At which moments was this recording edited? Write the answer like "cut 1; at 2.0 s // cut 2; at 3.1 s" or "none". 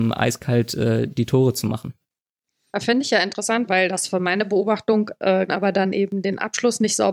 cut 1; at 3.7 s // cut 2; at 5.5 s